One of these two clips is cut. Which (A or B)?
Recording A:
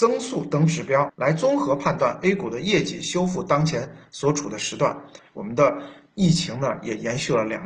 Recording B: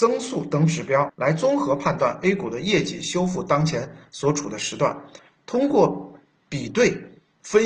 A